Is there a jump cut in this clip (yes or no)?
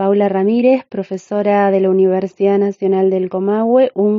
no